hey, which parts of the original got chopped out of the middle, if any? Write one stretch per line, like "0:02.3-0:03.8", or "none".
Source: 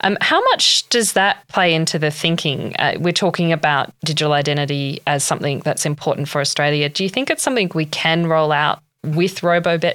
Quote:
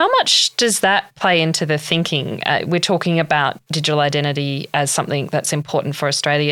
none